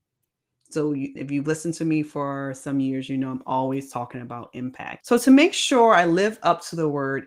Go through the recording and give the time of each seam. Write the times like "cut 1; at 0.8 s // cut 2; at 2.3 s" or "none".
cut 1; at 1.2 s // cut 2; at 5.0 s